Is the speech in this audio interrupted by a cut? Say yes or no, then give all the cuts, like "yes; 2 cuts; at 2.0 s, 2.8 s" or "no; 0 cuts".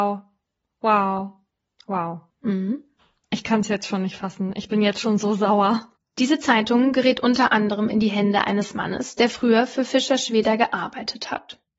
yes; 2 cuts; at 2.3 s, 6.0 s